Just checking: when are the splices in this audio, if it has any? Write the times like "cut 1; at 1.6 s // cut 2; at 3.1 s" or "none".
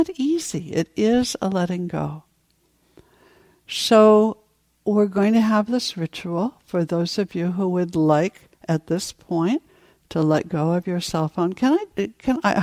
none